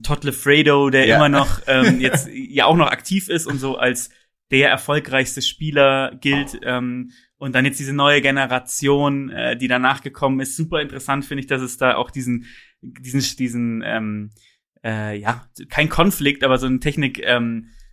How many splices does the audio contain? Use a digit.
1